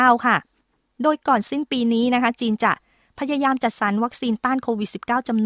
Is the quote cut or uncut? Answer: uncut